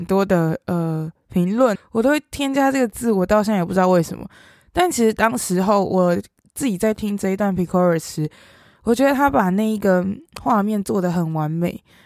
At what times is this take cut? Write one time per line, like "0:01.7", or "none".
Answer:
0:01.8